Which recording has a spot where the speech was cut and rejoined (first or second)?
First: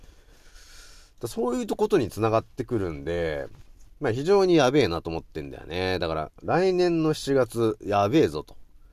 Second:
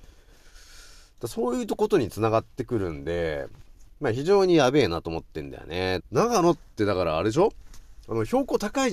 second